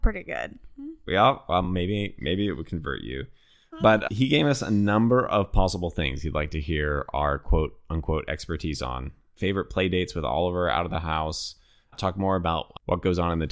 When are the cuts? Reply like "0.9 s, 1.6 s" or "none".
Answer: none